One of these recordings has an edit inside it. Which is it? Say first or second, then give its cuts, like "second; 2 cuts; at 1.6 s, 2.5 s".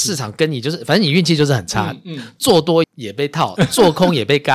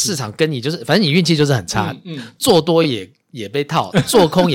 first; 1 cut; at 2.8 s